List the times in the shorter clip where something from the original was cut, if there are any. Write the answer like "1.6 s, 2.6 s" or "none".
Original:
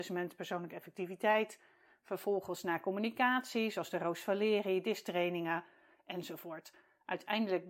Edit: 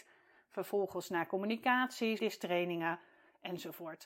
2.2 s